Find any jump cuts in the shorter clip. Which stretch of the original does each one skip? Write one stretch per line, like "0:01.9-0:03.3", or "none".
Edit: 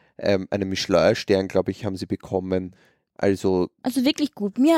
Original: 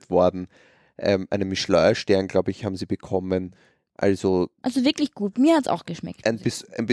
none